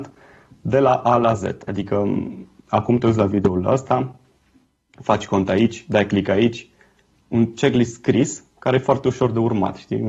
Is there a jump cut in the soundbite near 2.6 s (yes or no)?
yes